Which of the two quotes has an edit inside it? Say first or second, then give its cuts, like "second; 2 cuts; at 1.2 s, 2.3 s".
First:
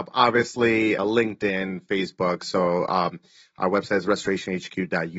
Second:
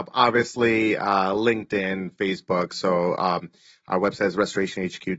first; 1 cut; at 1.0 s